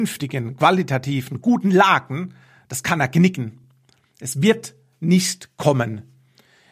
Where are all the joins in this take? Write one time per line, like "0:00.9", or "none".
none